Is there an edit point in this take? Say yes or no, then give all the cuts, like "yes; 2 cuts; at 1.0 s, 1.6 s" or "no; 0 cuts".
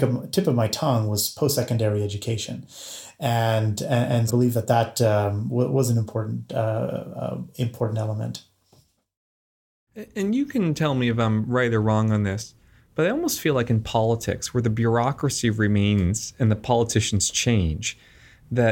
yes; 1 cut; at 4.3 s